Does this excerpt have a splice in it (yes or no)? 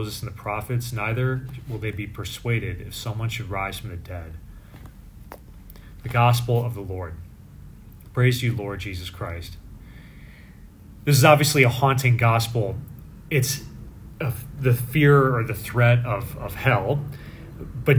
no